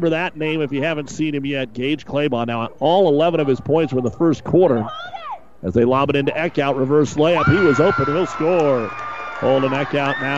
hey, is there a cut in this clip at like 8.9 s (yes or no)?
no